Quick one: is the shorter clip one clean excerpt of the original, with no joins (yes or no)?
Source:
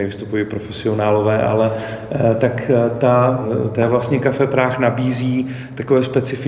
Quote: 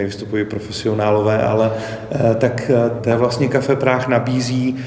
no